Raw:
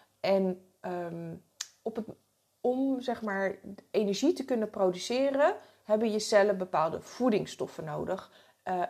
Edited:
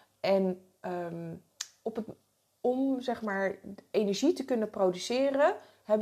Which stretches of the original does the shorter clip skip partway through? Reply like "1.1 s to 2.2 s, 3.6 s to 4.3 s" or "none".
none

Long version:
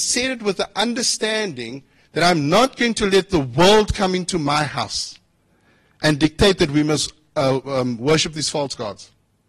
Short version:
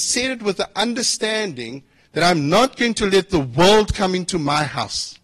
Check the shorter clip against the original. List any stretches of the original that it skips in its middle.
none

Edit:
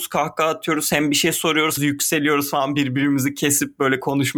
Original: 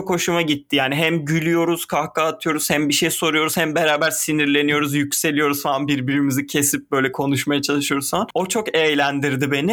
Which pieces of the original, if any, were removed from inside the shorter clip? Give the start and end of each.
3.5 s to 4.9 s

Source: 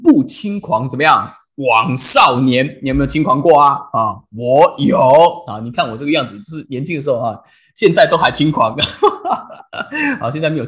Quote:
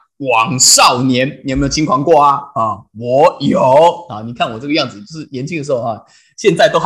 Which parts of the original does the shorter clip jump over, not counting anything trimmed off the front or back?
none

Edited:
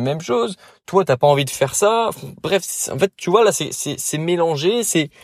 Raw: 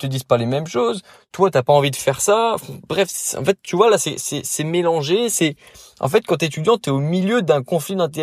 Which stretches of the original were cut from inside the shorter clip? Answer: none

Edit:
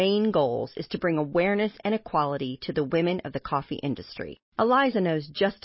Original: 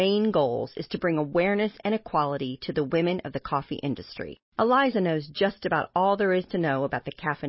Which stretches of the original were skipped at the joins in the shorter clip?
none

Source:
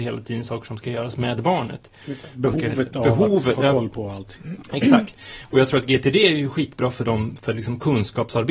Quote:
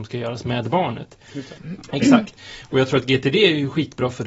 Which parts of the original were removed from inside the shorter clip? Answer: 2.3 s to 4.4 s

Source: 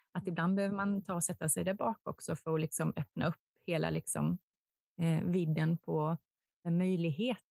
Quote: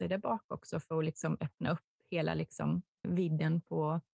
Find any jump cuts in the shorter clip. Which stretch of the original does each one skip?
4.6 s to 5.2 s

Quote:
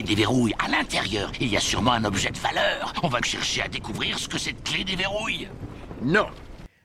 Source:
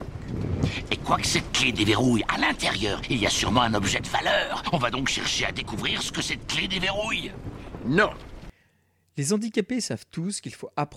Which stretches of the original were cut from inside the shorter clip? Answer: 4.9 s to 5.0 s

